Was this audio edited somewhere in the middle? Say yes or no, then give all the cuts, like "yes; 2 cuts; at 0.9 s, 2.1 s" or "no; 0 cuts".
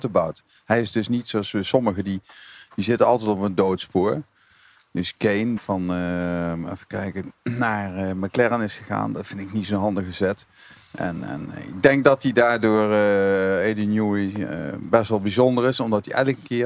yes; 1 cut; at 5.6 s